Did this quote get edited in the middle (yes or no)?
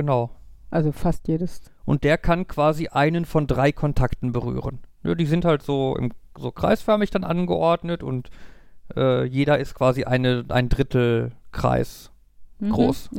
yes